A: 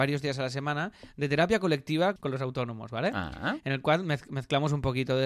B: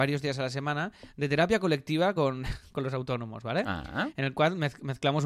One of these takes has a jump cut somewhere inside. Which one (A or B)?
A